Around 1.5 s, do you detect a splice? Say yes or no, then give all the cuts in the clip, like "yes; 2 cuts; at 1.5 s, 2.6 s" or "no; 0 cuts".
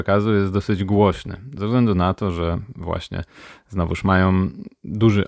no; 0 cuts